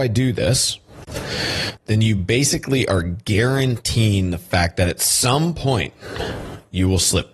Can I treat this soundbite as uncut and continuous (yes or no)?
yes